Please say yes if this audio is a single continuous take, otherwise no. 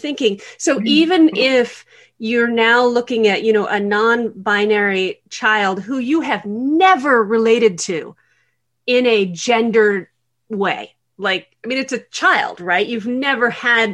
yes